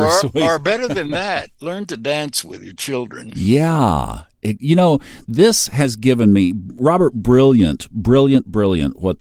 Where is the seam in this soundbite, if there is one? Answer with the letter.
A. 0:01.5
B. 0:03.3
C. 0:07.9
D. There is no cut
A